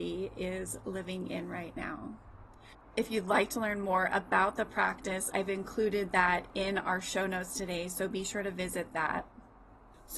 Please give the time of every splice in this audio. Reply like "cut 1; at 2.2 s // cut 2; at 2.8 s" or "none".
none